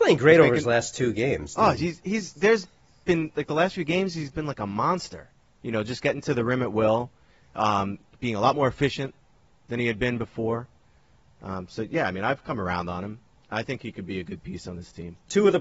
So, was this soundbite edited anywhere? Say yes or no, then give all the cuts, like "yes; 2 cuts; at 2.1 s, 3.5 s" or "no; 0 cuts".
no; 0 cuts